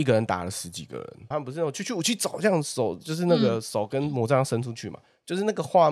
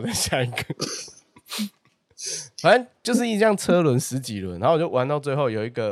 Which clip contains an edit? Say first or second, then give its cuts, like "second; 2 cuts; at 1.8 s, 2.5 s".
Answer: first; 1 cut; at 1.3 s